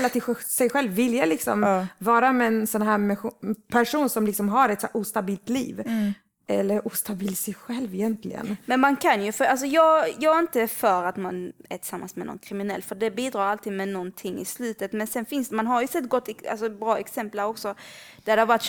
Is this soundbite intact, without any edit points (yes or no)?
yes